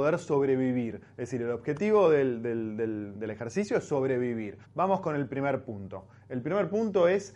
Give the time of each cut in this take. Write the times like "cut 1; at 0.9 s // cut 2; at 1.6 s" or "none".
cut 1; at 3.1 s // cut 2; at 4.6 s